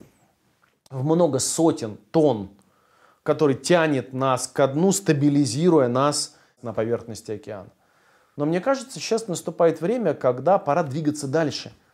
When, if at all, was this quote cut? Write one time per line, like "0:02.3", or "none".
0:08.3